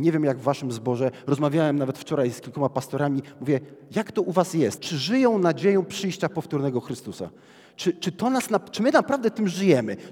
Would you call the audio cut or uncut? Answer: cut